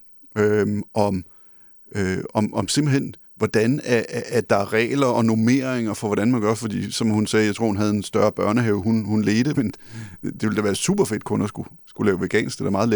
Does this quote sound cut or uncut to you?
cut